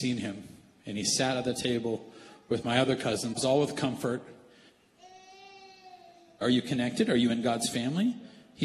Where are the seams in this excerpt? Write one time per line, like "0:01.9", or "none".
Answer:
0:03.4
0:06.4